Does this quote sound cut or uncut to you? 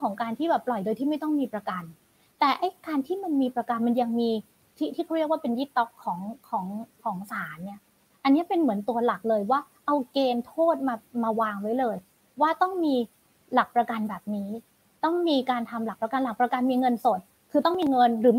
uncut